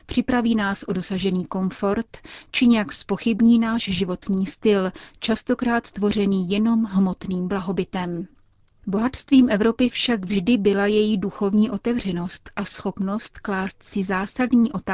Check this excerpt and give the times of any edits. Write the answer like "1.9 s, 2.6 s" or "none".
none